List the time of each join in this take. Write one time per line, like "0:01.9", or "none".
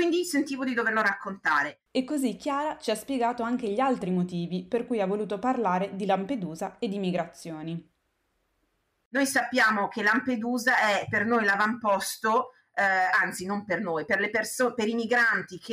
0:01.9